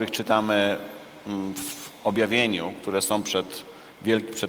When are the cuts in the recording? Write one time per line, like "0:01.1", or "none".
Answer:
none